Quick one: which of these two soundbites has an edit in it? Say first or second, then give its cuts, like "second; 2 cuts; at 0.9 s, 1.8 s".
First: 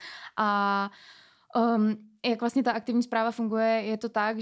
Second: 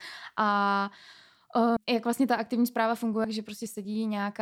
second; 2 cuts; at 1.8 s, 3.2 s